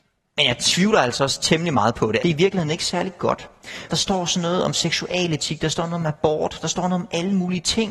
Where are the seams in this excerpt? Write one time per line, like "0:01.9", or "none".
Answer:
0:02.2
0:03.9

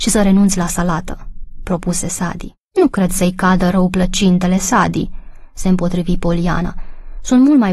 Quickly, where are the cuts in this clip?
0:02.7

